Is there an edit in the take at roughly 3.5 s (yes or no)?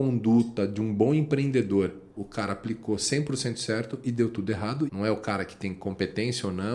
no